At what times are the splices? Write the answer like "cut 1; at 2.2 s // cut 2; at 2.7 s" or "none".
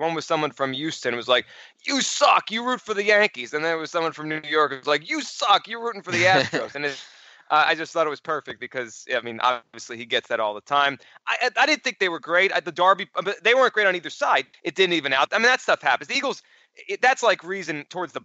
cut 1; at 14.5 s

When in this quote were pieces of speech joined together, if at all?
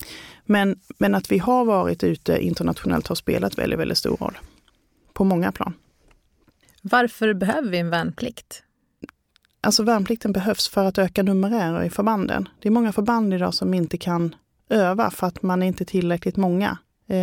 none

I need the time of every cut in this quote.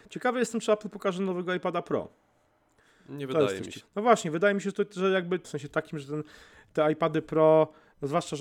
cut 1; at 3.8 s // cut 2; at 5.4 s

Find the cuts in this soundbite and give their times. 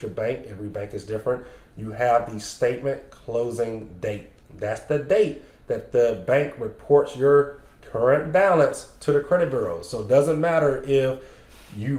none

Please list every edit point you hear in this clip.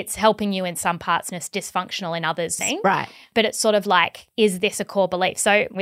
cut 1; at 2.6 s

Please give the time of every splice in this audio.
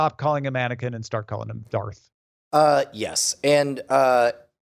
none

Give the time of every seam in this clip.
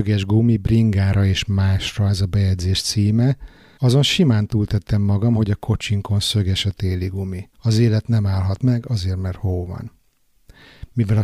cut 1; at 3.8 s // cut 2; at 7.5 s

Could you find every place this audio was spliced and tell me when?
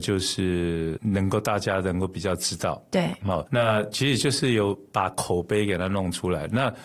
none

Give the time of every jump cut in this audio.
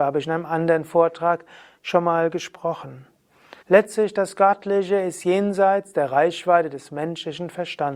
cut 1; at 3.6 s

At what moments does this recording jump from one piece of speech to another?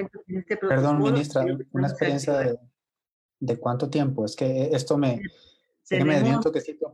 none

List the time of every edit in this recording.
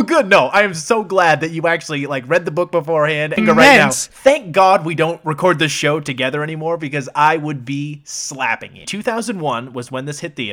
cut 1; at 3.4 s // cut 2; at 8.8 s

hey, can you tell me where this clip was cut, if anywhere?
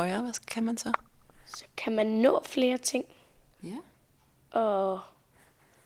none

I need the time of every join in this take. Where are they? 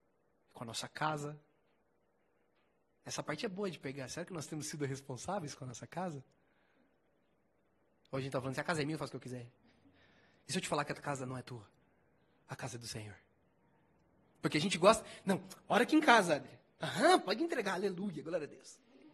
cut 1; at 16.8 s

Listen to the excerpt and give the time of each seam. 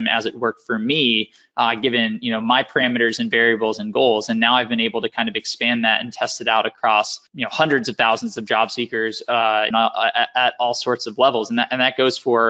cut 1; at 7.3 s // cut 2; at 9.7 s

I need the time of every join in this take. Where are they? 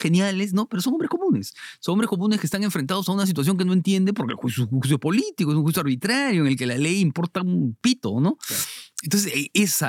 none

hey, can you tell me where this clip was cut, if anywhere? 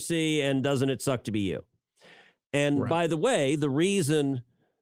none

